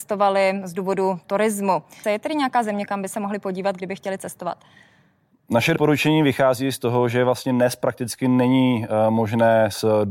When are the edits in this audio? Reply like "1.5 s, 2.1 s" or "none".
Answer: 2.0 s